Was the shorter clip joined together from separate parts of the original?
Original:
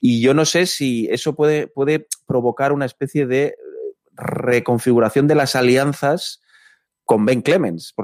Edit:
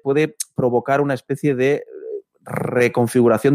no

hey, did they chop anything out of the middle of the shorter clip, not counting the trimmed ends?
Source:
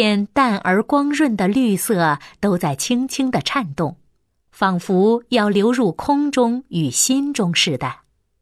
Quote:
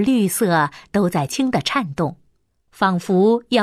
yes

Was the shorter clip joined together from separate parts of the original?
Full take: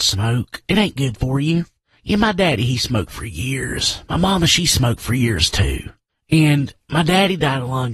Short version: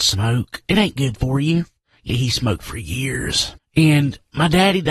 yes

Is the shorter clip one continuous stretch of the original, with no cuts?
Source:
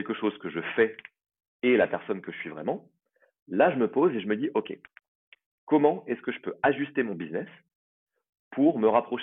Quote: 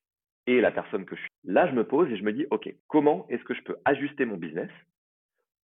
no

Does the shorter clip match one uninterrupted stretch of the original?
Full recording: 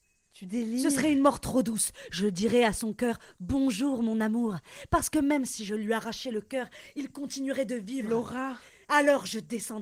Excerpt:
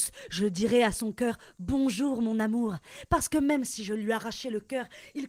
yes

